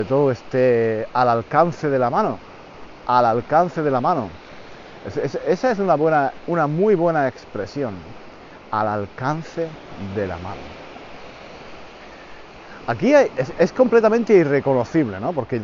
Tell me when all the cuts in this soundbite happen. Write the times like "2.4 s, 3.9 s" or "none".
none